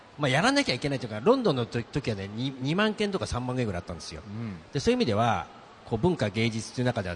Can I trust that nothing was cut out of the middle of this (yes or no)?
yes